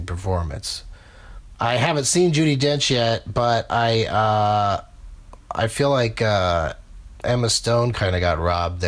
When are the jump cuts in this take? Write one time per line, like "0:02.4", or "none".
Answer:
0:01.5